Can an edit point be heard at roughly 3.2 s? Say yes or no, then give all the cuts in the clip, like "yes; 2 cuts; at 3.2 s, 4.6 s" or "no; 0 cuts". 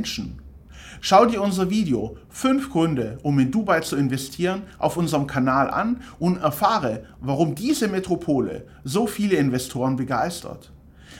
no; 1 cut; at 1.0 s